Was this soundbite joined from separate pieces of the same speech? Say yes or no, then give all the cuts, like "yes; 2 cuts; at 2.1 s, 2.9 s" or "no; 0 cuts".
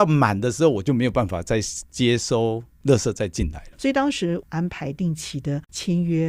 yes; 1 cut; at 3.7 s